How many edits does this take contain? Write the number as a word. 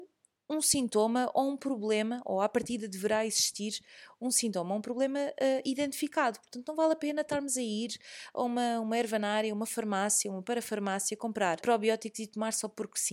one